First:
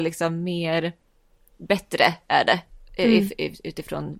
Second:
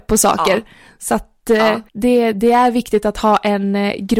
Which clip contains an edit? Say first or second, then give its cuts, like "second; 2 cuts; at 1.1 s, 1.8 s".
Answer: second; 1 cut; at 1.9 s